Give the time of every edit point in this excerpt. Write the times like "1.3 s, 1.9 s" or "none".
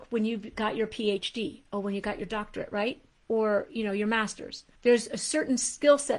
4.7 s